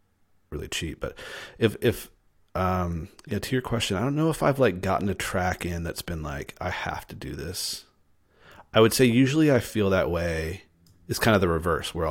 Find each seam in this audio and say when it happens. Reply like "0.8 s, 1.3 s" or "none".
none

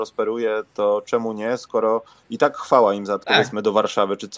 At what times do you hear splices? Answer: 3.2 s

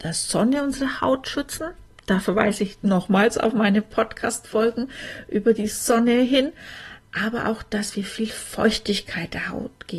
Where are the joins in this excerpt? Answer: none

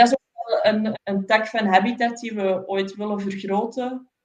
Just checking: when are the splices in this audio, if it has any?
0.9 s

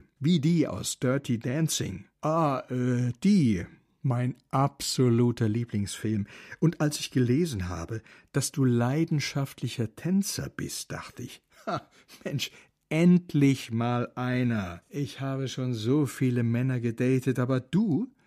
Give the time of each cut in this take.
none

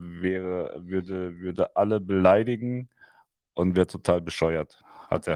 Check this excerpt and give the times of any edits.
none

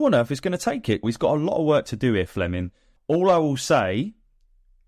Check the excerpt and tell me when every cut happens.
1.0 s, 3.0 s

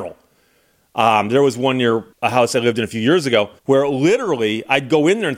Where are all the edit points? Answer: 2.1 s, 3.6 s

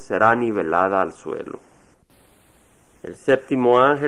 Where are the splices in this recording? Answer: 3.0 s

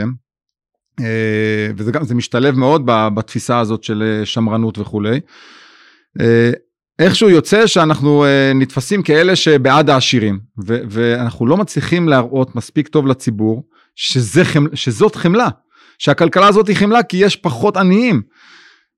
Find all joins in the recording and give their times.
none

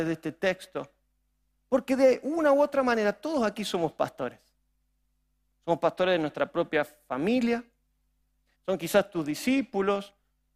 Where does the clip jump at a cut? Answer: 8.5 s

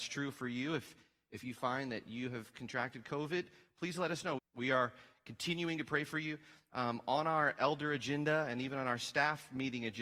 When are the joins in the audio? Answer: 4.4 s

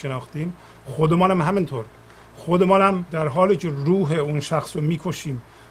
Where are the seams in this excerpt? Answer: none

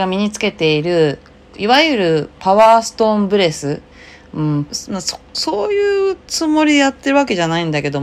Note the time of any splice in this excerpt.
4.7 s

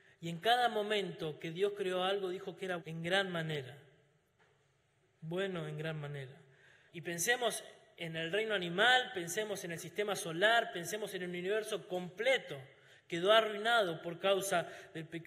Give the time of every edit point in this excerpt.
2.8 s, 6.9 s

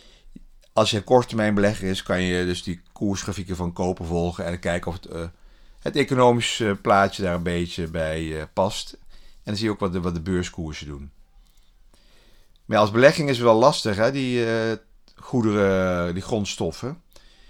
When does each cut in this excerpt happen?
none

